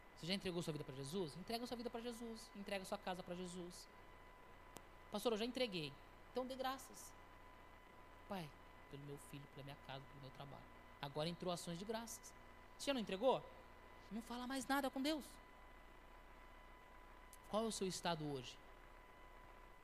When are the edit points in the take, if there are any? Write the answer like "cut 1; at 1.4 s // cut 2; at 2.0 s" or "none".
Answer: cut 1; at 8.9 s // cut 2; at 14.1 s // cut 3; at 17.5 s